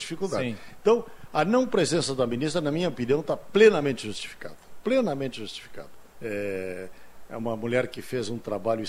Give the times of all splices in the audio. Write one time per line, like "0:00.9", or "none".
0:06.1

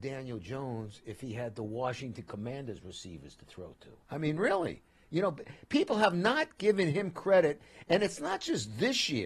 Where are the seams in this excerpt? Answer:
0:04.0

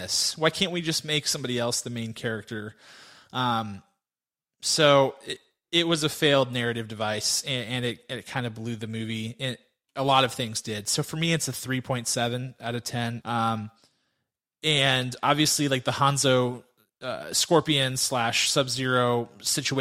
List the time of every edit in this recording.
0:13.2

